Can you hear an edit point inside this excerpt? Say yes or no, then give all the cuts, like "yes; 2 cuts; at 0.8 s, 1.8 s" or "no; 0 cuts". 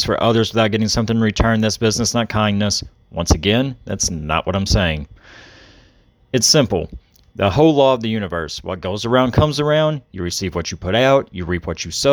no; 0 cuts